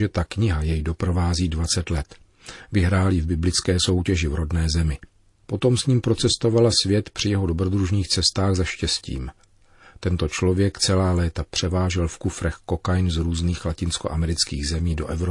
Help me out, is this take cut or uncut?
uncut